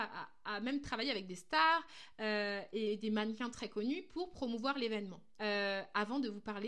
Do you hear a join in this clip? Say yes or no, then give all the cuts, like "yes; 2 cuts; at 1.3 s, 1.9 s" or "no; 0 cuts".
yes; 1 cut; at 5.4 s